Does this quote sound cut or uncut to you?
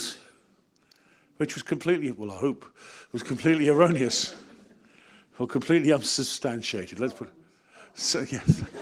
uncut